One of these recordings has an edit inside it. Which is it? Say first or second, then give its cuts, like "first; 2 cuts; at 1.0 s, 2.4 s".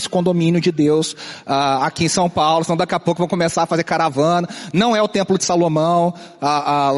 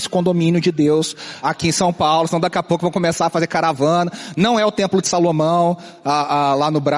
second; 1 cut; at 1.4 s